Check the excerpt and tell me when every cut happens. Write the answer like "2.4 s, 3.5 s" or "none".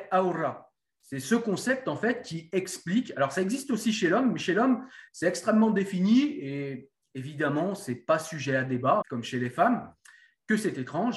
9.0 s